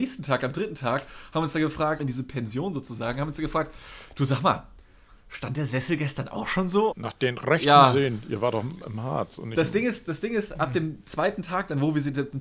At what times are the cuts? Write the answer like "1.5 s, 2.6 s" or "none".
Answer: 2.0 s, 6.9 s